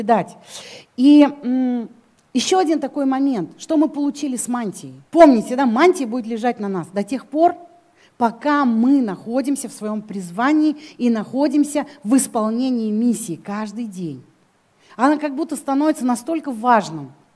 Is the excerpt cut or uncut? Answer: cut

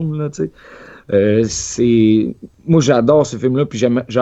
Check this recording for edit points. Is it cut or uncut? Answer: uncut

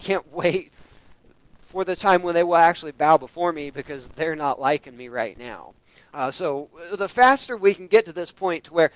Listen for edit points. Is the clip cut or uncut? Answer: cut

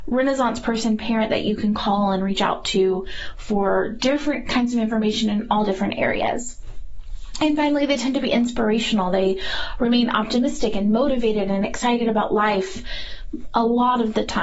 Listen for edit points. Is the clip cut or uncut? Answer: uncut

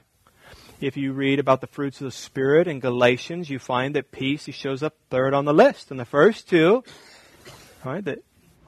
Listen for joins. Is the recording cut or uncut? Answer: cut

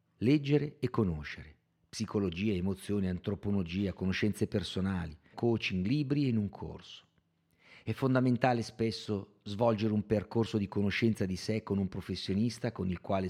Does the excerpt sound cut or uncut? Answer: cut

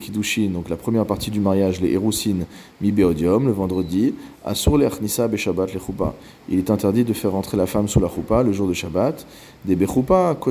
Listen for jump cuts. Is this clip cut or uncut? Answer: uncut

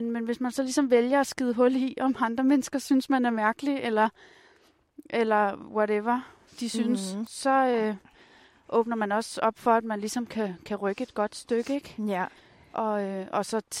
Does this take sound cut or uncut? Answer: uncut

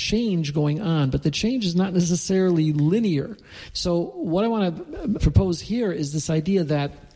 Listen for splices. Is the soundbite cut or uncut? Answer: cut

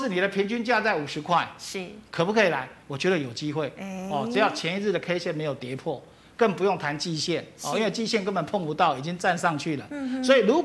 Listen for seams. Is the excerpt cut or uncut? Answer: uncut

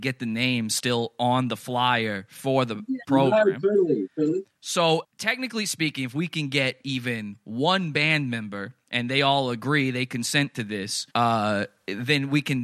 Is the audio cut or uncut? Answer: cut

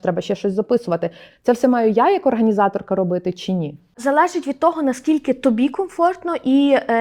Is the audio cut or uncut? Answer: uncut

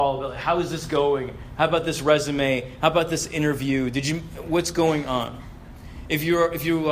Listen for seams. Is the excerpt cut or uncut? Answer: uncut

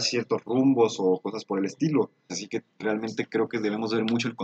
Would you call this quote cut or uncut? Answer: cut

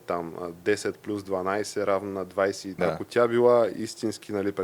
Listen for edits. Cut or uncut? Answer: cut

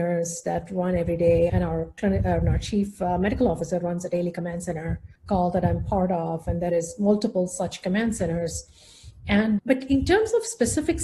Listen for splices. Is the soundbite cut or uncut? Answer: cut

